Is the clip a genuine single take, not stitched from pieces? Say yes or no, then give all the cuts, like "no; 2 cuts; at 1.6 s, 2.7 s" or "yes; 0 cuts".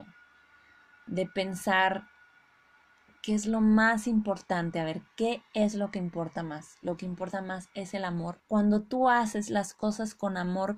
no; 1 cut; at 8.4 s